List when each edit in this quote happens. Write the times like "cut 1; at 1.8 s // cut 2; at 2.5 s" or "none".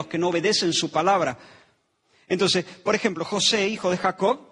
none